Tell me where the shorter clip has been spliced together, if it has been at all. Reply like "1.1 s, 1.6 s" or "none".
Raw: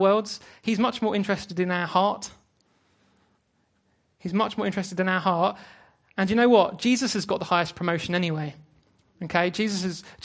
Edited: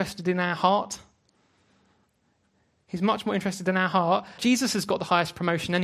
4.4 s